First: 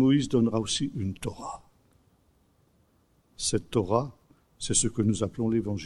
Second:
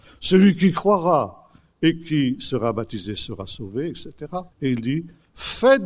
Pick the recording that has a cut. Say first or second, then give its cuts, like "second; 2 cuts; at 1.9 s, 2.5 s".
second; 1 cut; at 4.5 s